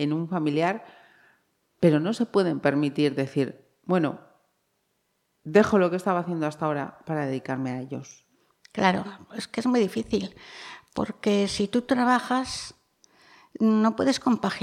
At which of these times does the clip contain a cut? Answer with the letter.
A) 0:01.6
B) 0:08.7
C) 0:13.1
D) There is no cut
D